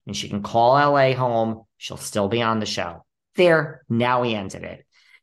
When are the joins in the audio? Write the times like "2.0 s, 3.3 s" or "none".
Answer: none